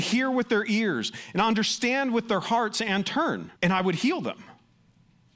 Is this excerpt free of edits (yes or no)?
no